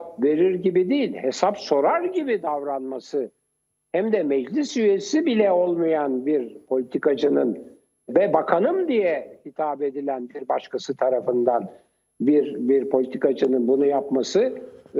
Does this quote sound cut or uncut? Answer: cut